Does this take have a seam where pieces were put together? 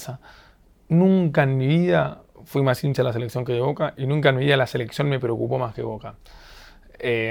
no; 0 cuts

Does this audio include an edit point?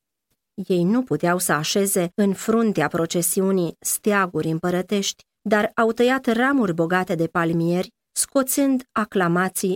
yes; 1 cut; at 8.1 s

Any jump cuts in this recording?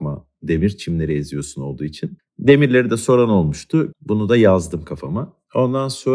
yes; 2 cuts; at 2.2 s, 3.9 s

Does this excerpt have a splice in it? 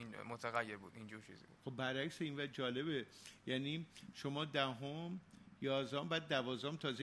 yes; 1 cut; at 1.6 s

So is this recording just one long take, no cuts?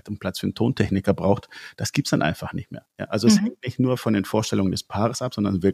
yes; 0 cuts

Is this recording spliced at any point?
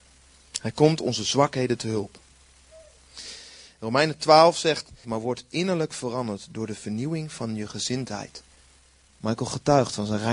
yes; 2 cuts; at 5.0 s, 9.1 s

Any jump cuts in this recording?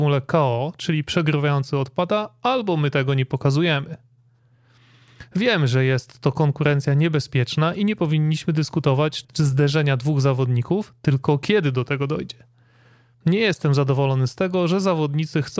yes; 1 cut; at 9.2 s

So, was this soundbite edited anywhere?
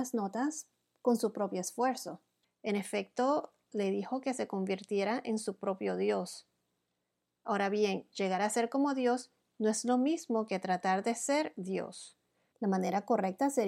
yes; 2 cuts; at 2.4 s, 12.5 s

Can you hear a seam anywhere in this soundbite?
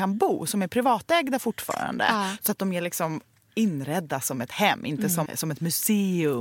yes; 1 cut; at 5.3 s

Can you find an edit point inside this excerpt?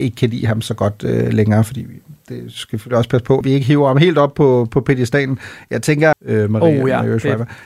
yes; 2 cuts; at 3.4 s, 6.1 s

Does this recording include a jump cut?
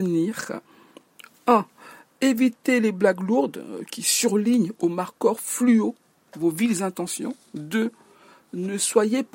no; 0 cuts

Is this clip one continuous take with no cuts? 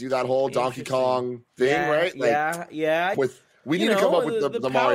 no; 2 cuts; at 1.5 s, 3.1 s

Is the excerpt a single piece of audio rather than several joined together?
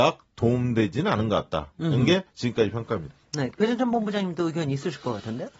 yes; 0 cuts

